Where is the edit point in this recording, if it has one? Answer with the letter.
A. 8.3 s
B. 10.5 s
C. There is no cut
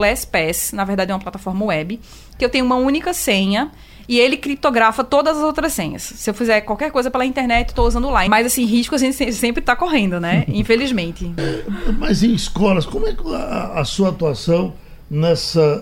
A